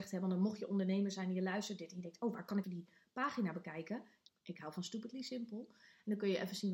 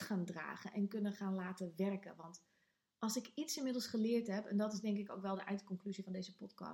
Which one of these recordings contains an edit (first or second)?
first